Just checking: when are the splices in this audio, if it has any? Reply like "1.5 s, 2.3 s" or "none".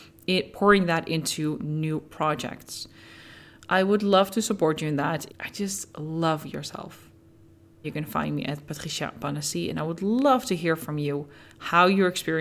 5.3 s, 7.8 s